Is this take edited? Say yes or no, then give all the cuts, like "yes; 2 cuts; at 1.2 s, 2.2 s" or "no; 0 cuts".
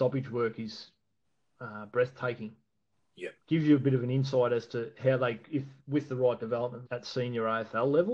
yes; 2 cuts; at 3.4 s, 6.9 s